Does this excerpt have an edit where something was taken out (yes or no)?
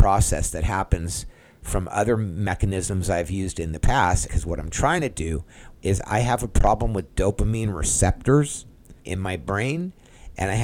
yes